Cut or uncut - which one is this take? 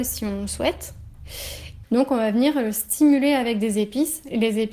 cut